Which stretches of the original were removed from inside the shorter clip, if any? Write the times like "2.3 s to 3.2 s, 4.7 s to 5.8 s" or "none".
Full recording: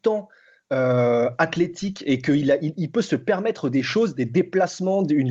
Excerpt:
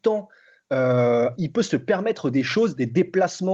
1.4 s to 2.7 s

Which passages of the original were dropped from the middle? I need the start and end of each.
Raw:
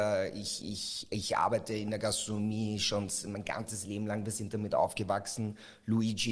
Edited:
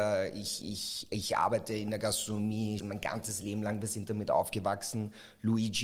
2.8 s to 3.2 s

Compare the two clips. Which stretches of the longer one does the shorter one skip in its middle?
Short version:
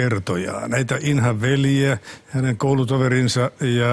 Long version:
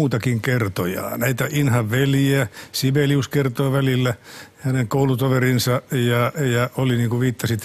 2.7 s to 4.5 s

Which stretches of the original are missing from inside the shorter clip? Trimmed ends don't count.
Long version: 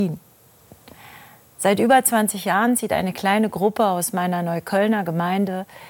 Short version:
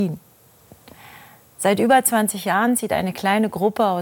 none

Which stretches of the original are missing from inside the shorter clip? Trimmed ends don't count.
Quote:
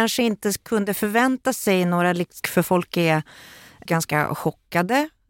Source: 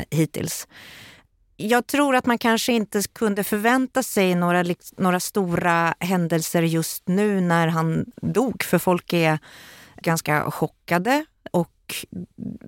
4.9 s to 8.6 s

